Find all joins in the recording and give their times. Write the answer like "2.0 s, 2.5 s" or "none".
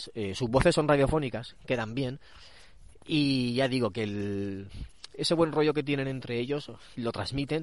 none